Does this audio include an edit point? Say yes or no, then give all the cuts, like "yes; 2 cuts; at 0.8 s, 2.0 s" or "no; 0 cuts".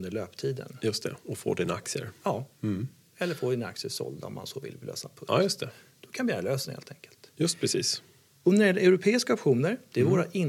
no; 0 cuts